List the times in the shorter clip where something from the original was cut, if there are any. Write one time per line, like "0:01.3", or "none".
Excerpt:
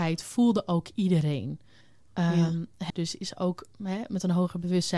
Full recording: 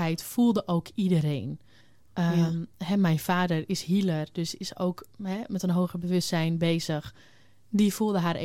0:02.9